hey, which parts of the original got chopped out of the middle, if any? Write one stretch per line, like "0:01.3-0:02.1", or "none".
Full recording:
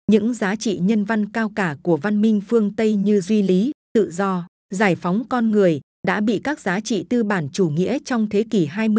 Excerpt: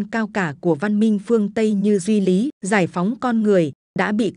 0:03.8-0:04.6